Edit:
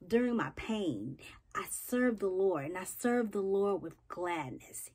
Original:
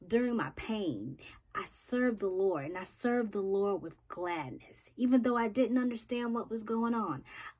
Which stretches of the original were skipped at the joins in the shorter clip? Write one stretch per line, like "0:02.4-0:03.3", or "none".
none